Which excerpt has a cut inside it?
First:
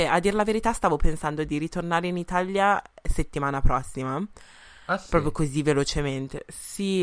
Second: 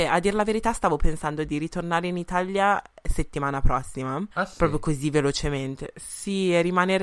second; 1 cut; at 4.3 s

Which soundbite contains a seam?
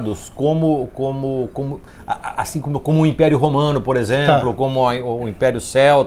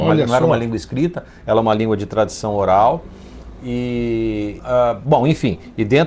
second; 1 cut; at 4.6 s

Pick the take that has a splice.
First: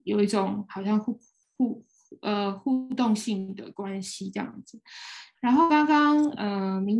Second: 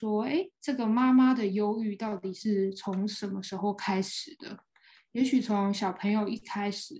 first; 1 cut; at 5.3 s

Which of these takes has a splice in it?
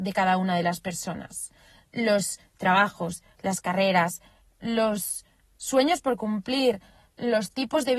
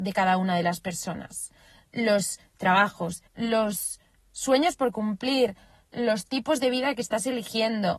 second; 1 cut; at 3.3 s

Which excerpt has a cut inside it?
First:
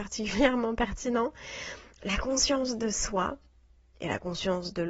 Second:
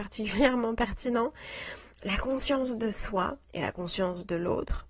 second; 1 cut; at 3.4 s

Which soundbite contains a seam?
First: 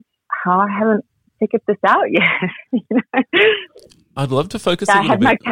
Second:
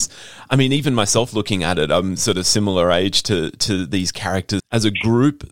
second; 1 cut; at 4.6 s

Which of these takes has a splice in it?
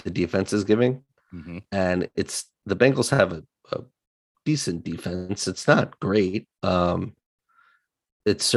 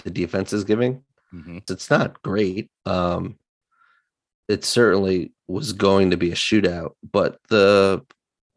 second; 1 cut; at 1.7 s

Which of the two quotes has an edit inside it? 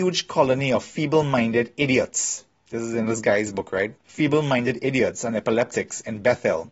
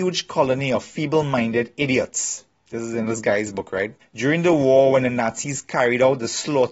second; 1 cut; at 4.0 s

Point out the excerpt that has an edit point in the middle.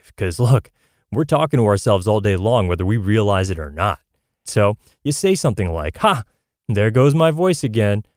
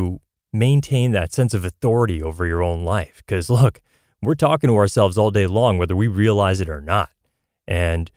first; 1 cut; at 4.5 s

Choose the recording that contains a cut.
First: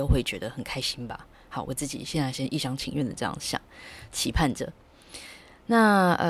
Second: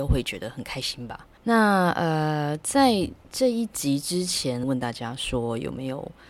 second; 2 cuts; at 1.4 s, 4.6 s

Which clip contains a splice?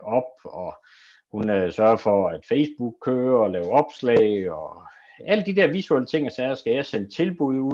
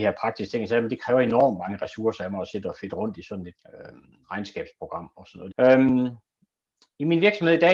second; 2 cuts; at 3.6 s, 5.5 s

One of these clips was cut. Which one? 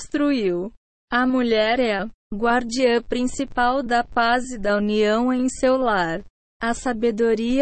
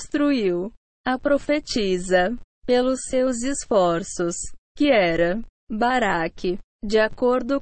second; 2 cuts; at 0.9 s, 4.6 s

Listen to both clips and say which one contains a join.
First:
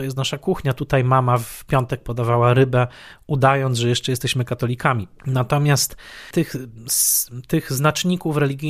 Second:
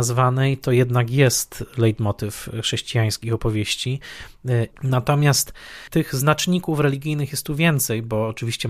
second; 2 cuts; at 4.7 s, 5.9 s

